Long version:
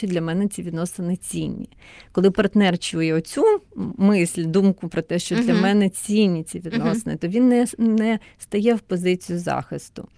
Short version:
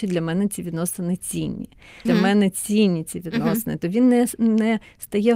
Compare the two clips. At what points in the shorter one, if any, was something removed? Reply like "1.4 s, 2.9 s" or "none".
2.1 s